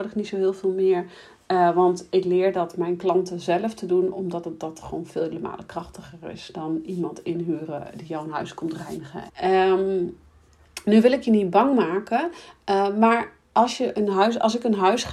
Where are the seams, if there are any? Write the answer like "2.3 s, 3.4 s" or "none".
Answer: 9.3 s